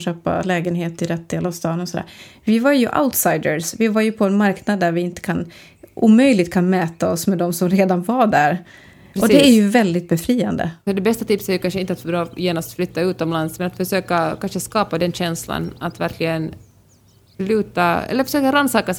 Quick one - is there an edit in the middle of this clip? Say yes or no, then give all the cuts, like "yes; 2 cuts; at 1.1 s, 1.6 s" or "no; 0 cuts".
no; 0 cuts